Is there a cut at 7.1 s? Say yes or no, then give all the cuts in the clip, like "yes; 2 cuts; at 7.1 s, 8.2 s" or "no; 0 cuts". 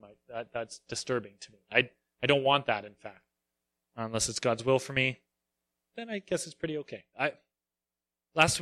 yes; 1 cut; at 7.1 s